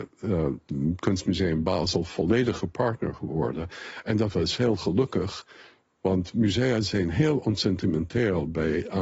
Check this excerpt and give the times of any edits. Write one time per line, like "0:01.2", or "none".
none